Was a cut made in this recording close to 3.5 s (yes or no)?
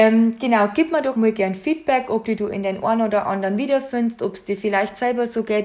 no